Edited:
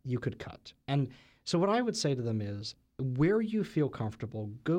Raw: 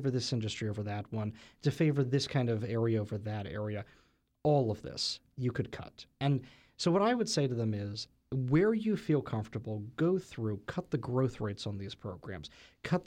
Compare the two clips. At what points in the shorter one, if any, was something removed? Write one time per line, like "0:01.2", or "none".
none